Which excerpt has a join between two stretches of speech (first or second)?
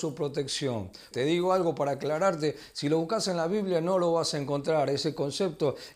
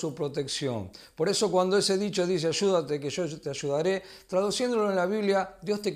first